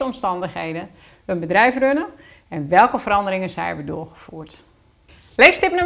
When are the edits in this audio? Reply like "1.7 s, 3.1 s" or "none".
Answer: none